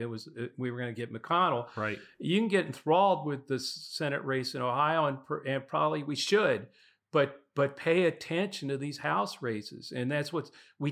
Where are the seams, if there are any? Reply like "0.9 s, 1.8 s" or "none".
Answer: none

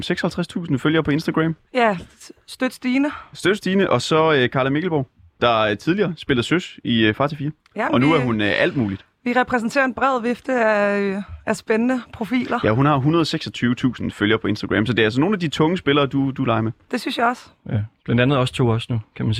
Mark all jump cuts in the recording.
none

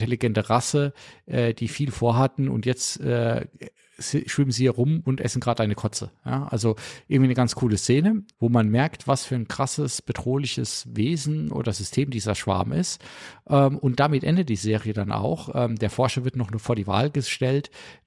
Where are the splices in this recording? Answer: 8.3 s

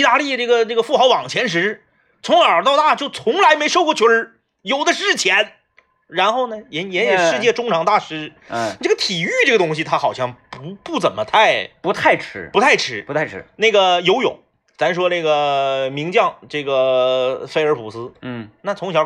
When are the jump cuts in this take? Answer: none

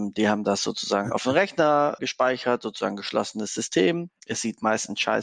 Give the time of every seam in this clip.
2.0 s

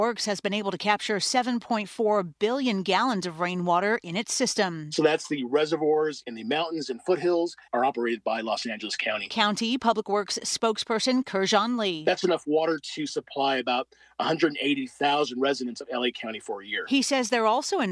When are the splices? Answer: 7.7 s

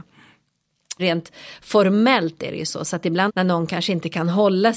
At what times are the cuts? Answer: 1.0 s, 3.3 s

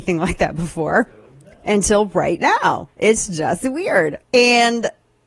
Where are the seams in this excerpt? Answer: 4.2 s

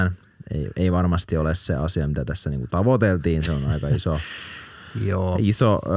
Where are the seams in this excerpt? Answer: none

